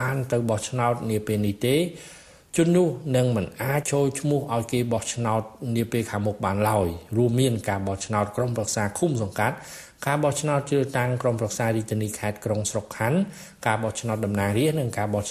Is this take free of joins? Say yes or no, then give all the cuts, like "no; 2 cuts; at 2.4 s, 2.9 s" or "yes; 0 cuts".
no; 1 cut; at 3.8 s